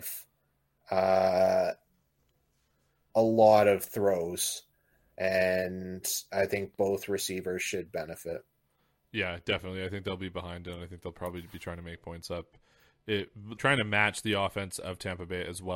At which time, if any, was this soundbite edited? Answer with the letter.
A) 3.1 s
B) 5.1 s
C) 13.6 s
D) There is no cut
C